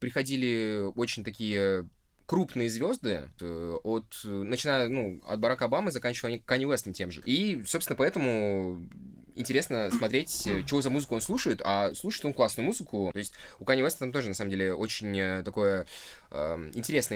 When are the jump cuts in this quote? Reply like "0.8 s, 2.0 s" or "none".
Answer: 3.4 s, 7.2 s, 13.1 s